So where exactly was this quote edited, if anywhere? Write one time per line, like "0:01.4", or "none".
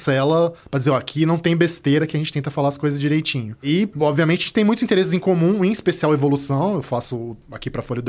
none